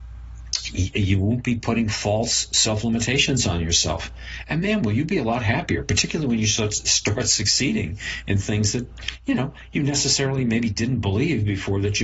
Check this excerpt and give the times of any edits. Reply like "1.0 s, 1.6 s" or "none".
none